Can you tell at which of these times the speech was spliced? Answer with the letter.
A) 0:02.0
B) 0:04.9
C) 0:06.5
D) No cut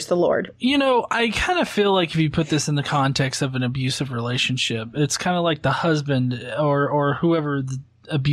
D